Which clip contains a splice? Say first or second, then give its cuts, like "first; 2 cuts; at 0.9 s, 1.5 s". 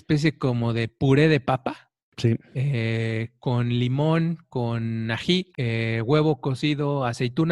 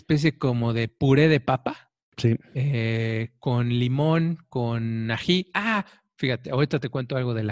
first; 1 cut; at 5.5 s